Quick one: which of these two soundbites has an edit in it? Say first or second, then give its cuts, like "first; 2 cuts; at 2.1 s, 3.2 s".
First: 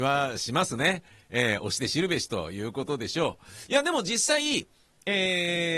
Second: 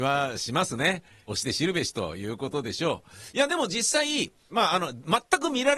second; 2 cuts; at 1.3 s, 4.5 s